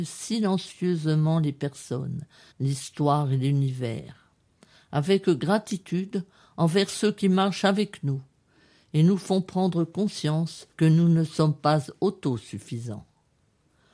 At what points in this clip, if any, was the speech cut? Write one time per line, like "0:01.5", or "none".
0:02.5
0:10.7